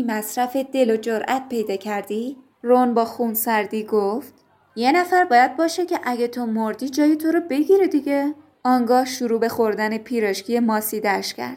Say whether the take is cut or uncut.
cut